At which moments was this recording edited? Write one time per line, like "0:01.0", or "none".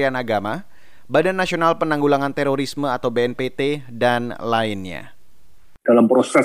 none